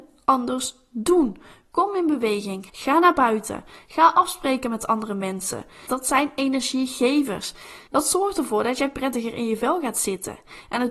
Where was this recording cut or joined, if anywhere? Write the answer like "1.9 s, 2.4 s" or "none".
2.7 s, 5.9 s